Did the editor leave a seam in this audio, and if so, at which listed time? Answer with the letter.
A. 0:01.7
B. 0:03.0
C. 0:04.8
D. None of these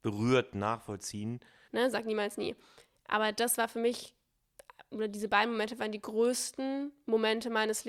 A